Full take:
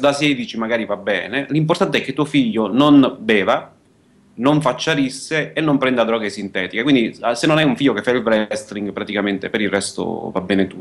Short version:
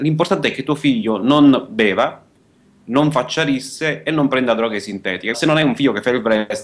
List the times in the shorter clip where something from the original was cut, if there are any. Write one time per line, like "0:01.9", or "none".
0:05.3